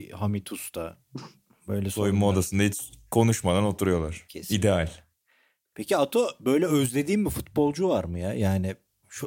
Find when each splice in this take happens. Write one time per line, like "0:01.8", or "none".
none